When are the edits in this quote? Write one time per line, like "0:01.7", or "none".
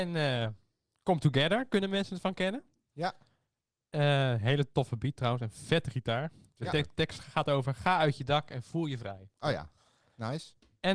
none